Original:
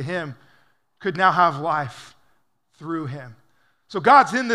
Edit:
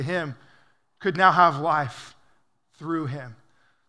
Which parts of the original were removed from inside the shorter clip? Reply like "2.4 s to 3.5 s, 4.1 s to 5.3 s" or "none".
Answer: none